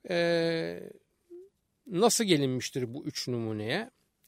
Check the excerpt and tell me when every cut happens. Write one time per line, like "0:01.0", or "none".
none